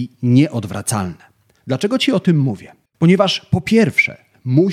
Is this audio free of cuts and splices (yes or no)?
no